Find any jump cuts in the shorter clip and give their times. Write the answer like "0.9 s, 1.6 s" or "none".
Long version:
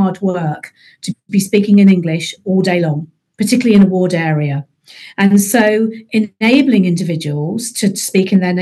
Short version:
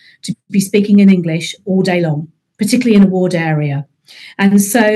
none